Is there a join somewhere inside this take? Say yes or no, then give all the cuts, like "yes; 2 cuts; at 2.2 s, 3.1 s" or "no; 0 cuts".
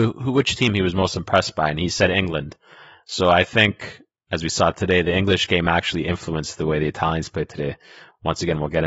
no; 0 cuts